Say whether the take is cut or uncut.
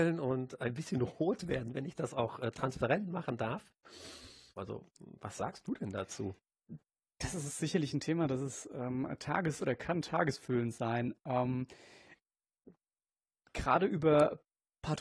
cut